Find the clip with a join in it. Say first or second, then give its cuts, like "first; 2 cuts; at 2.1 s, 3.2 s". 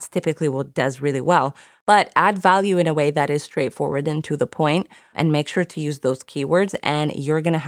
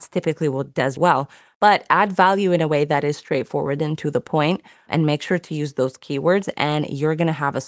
second; 1 cut; at 1.0 s